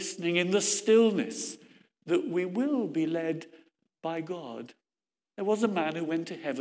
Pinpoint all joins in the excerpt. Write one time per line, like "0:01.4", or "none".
none